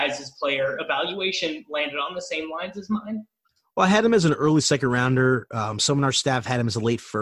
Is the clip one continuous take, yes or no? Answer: yes